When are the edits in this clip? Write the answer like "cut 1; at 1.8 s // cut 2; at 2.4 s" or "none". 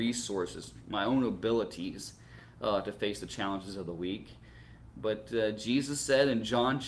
none

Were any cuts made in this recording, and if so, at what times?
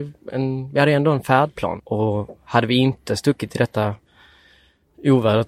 cut 1; at 1.8 s

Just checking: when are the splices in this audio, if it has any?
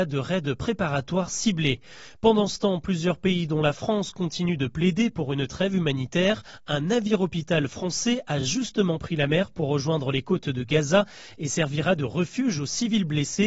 none

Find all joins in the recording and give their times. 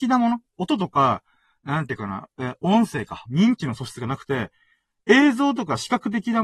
cut 1; at 3.3 s

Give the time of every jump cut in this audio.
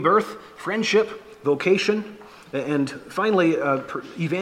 none

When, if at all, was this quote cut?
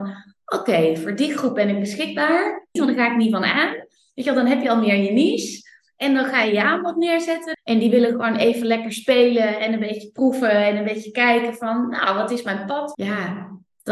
cut 1; at 2.8 s // cut 2; at 7.5 s // cut 3; at 12.9 s

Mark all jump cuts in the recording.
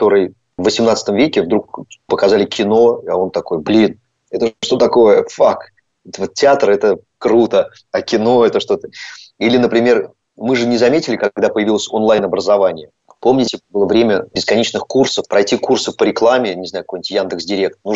none

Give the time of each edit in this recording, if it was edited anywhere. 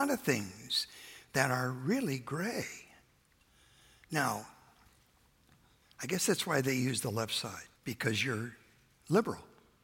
cut 1; at 5.8 s // cut 2; at 7.8 s

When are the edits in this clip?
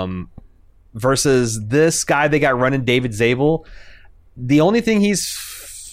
none

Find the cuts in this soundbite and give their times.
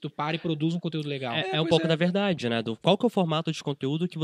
none

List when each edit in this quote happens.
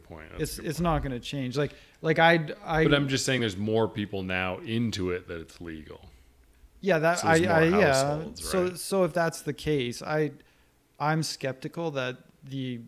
none

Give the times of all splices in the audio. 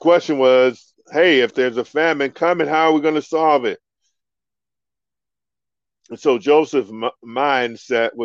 none

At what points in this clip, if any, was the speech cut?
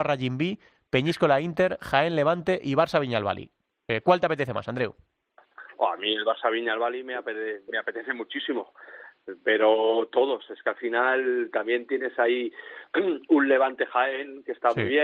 none

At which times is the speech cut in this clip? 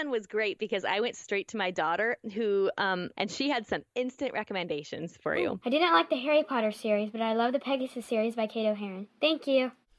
cut 1; at 3.1 s // cut 2; at 5.6 s

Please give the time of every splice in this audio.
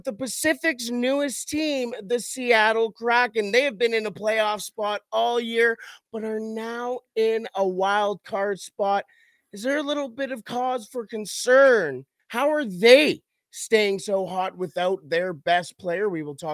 cut 1; at 12.2 s

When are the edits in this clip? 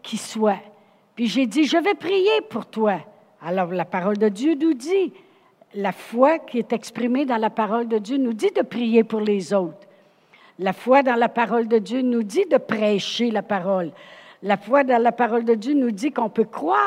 none

